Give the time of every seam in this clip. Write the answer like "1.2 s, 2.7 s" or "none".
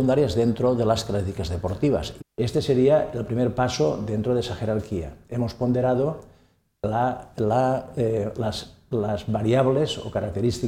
2.2 s